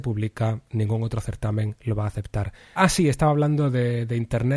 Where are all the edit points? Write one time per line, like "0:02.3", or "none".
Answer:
0:02.8